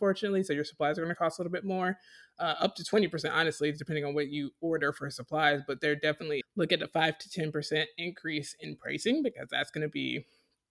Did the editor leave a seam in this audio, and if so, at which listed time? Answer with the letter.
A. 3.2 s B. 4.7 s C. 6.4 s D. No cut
C